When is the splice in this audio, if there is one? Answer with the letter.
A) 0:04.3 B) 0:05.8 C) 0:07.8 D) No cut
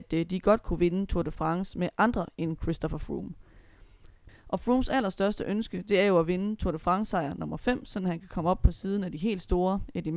A